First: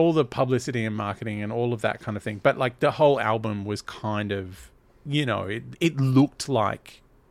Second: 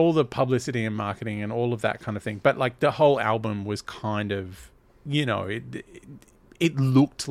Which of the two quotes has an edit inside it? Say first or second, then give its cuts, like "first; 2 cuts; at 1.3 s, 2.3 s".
first; 1 cut; at 5.7 s